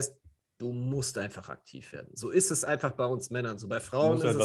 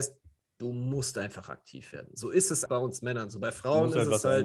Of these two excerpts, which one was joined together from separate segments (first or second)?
second